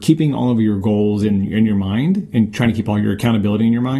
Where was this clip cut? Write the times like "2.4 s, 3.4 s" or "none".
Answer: none